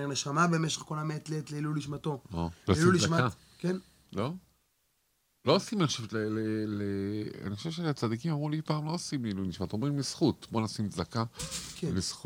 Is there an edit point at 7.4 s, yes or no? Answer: no